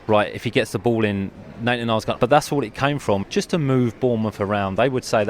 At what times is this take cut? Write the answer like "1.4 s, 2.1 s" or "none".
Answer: 2.2 s, 3.2 s